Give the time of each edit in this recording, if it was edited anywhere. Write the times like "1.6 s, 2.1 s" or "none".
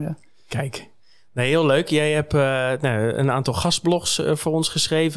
none